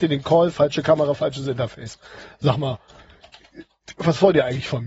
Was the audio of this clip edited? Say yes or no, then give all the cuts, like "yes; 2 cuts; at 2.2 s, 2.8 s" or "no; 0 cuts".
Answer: no; 0 cuts